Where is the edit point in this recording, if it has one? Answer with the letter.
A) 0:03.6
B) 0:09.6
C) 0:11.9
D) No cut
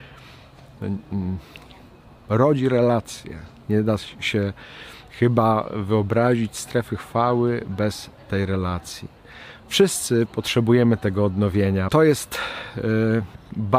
C